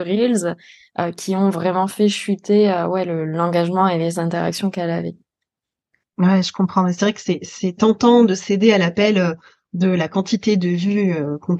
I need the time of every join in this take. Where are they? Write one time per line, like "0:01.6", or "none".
none